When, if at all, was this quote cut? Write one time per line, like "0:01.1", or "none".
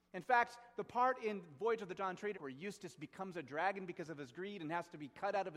0:02.3